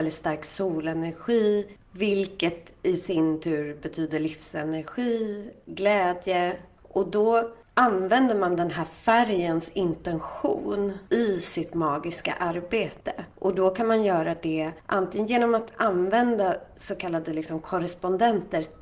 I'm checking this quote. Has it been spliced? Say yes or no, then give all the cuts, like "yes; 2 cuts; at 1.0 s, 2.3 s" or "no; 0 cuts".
no; 0 cuts